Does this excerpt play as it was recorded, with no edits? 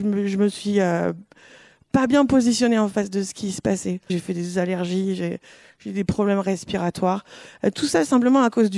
no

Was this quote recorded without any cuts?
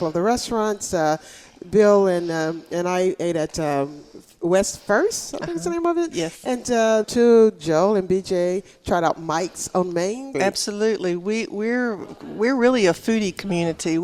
no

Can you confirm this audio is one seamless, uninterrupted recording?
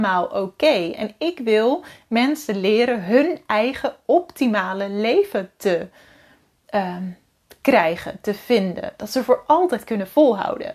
yes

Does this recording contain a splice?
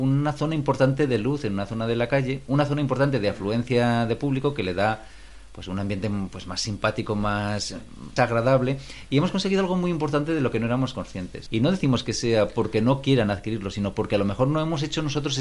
yes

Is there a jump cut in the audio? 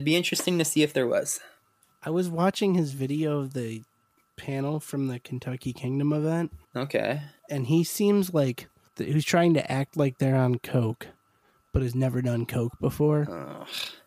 no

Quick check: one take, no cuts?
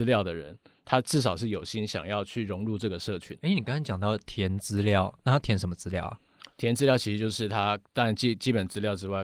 no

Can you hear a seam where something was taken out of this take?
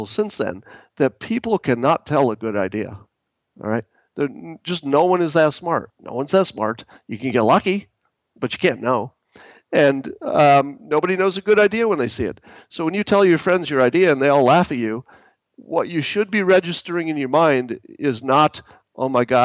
yes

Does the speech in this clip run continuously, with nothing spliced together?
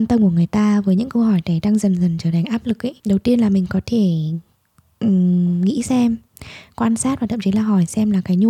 no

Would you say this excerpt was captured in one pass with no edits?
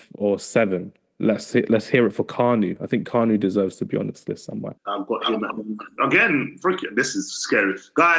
no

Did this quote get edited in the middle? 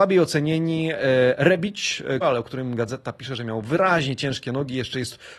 yes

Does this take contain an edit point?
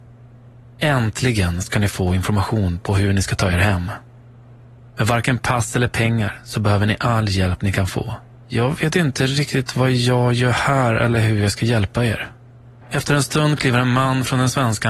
yes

